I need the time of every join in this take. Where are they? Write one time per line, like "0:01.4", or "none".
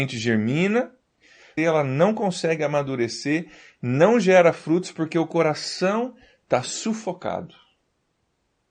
0:01.6